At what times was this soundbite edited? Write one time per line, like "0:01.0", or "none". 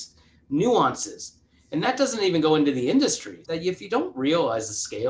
0:03.4